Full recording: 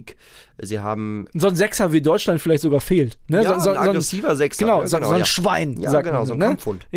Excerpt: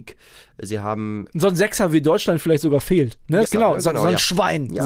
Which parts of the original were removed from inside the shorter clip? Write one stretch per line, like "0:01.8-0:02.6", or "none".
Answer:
0:03.4-0:04.5